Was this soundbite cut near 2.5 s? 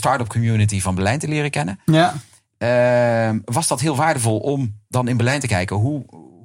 no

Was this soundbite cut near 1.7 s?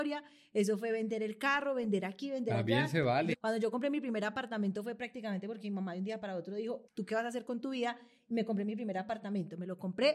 no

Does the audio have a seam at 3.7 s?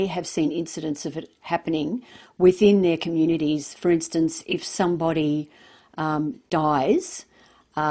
no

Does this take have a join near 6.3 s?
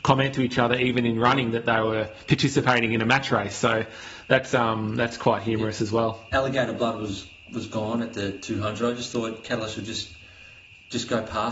yes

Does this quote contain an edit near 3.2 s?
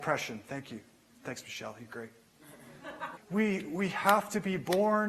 yes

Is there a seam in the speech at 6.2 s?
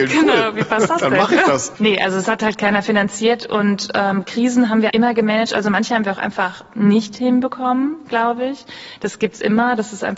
no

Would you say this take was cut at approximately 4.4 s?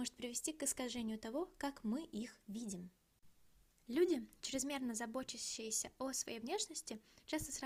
no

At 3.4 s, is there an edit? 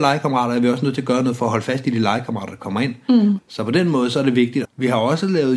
yes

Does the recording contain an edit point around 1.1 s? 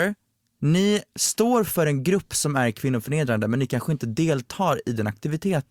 yes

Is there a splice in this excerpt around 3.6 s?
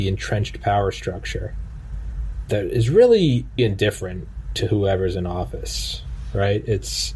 yes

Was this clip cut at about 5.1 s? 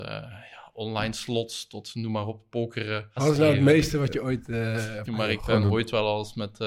yes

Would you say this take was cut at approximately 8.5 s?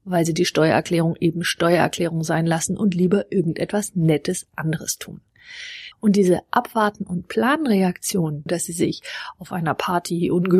yes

